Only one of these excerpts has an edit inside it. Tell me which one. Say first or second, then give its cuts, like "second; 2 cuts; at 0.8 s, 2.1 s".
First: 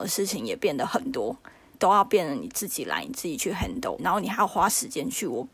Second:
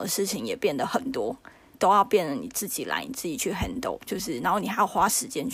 first; 1 cut; at 4.0 s